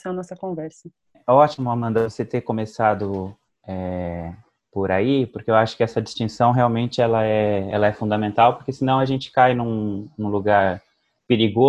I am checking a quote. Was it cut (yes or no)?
no